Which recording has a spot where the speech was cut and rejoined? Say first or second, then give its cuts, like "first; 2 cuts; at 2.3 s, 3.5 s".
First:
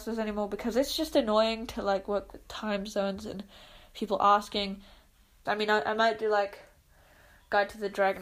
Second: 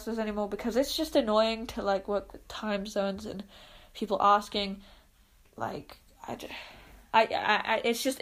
first; 1 cut; at 5.5 s